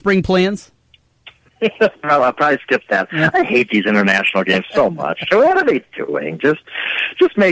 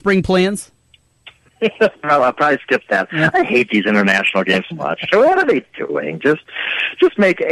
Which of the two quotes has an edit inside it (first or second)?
second